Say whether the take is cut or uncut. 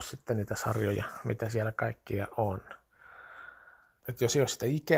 cut